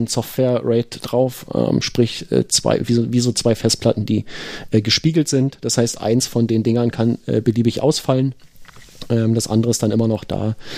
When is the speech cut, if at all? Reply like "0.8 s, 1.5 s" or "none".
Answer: none